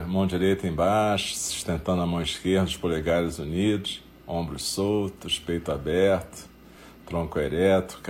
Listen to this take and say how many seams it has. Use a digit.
0